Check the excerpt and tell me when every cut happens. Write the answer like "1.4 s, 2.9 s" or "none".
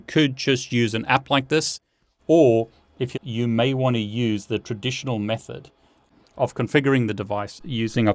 3.1 s